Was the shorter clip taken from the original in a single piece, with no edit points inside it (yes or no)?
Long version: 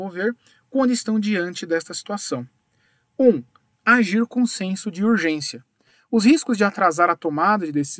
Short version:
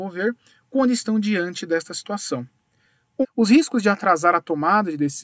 no